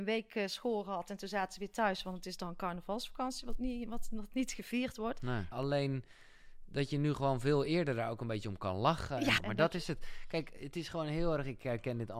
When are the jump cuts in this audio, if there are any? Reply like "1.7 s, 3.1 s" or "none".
5.5 s, 9.4 s